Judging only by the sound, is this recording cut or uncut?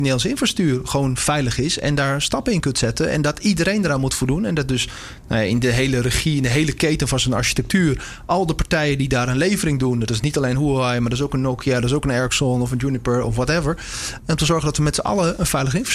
cut